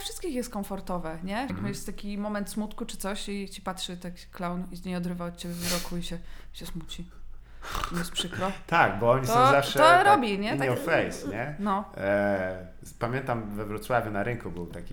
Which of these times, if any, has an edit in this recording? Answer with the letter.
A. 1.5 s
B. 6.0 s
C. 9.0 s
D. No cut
A